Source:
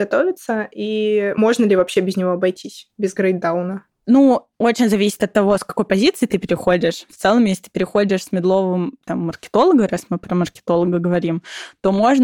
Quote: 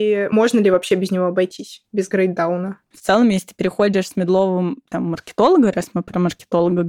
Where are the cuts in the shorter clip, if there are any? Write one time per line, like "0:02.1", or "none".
0:02.9